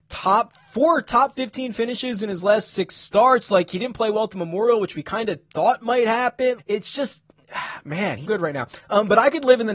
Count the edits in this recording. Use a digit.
2